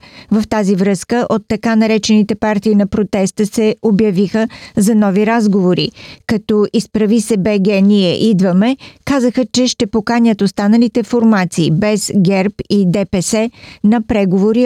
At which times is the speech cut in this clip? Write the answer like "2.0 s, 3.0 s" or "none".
none